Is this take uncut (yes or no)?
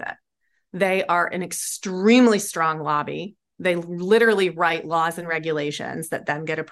yes